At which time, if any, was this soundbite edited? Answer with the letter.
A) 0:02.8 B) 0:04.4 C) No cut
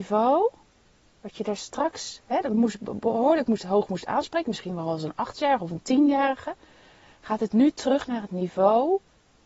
C